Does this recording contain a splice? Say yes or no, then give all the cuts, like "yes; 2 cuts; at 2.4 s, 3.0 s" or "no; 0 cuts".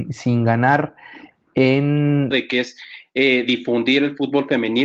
yes; 1 cut; at 2.3 s